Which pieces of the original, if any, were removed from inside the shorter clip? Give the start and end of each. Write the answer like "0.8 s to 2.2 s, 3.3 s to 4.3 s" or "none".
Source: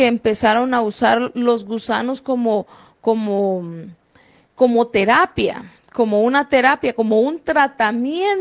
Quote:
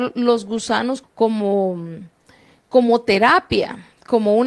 2.2 s to 2.9 s